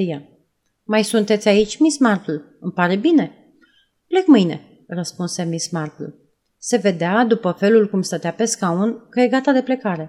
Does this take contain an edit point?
no; 0 cuts

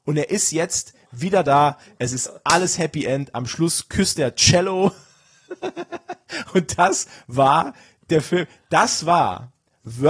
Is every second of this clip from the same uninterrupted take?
yes; 0 cuts

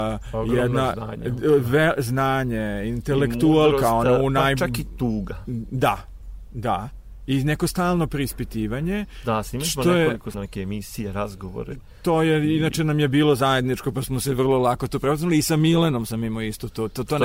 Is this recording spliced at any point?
yes; 1 cut; at 10.3 s

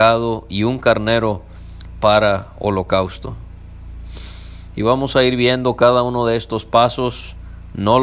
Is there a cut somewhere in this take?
no; 0 cuts

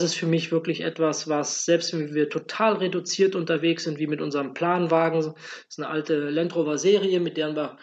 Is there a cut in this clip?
no; 0 cuts

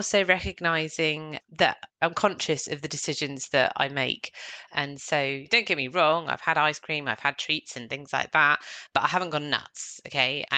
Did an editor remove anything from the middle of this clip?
yes; 1 cut; at 1.9 s

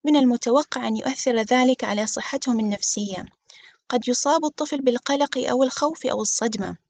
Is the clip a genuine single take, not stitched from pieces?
yes; 0 cuts

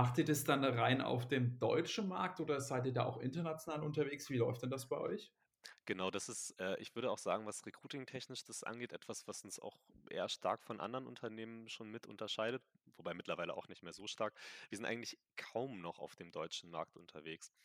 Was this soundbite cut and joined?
no; 0 cuts

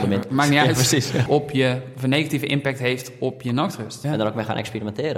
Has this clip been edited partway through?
yes; 2 cuts; at 1.3 s, 4.0 s

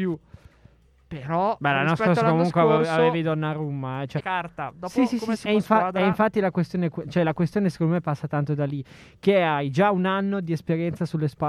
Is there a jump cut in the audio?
yes; 2 cuts; at 4.2 s, 5.5 s

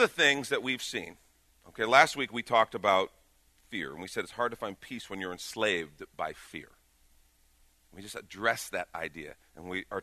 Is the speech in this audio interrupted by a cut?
no; 0 cuts

